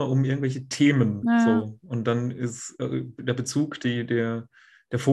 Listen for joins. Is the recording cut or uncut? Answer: uncut